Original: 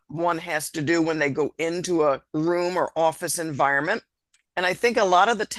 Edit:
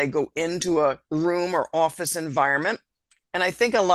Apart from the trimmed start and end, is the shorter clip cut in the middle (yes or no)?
no